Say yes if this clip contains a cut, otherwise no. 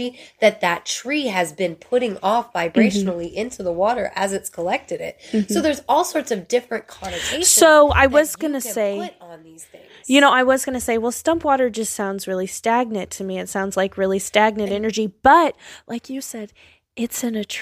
no